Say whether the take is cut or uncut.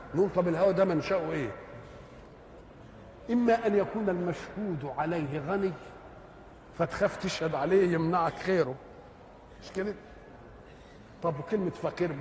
uncut